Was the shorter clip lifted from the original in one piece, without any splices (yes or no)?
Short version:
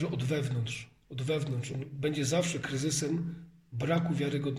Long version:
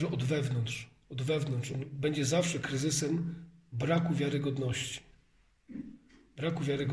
yes